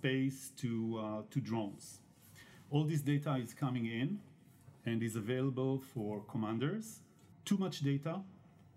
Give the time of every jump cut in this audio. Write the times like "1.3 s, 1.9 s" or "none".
7.3 s